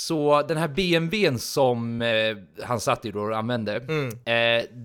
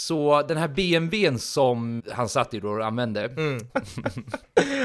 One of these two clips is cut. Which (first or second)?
second